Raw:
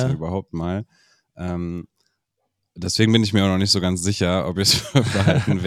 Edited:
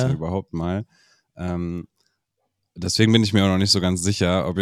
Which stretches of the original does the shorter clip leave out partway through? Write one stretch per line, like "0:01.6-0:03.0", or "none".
none